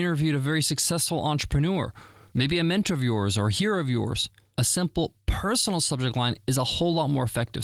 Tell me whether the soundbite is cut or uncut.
uncut